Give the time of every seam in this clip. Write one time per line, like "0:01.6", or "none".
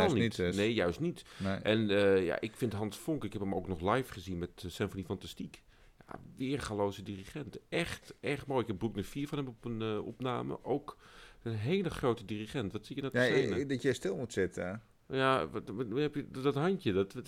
none